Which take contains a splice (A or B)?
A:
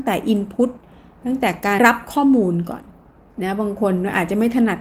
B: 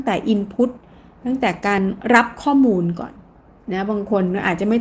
A